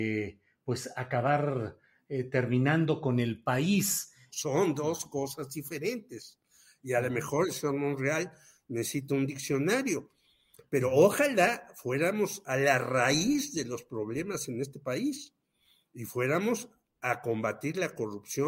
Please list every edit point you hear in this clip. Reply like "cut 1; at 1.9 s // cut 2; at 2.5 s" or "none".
cut 1; at 4.3 s